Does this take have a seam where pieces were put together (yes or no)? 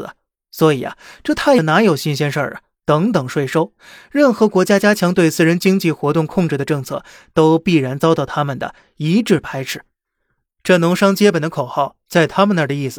yes